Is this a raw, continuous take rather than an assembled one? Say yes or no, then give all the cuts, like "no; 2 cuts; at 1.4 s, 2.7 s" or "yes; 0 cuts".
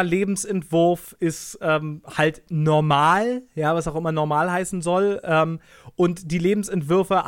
yes; 0 cuts